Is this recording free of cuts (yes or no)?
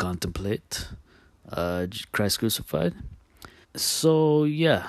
no